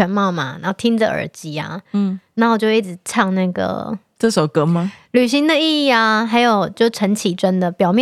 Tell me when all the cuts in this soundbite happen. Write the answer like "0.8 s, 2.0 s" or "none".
none